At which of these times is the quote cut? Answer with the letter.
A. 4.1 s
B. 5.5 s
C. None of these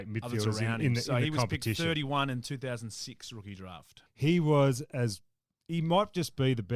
A